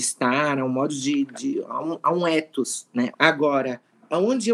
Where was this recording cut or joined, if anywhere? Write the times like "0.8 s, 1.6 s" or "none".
3.1 s